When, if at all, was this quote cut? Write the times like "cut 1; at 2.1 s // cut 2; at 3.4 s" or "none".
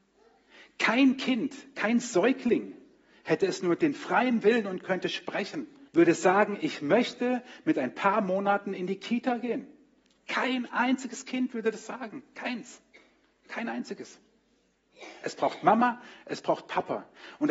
cut 1; at 5.9 s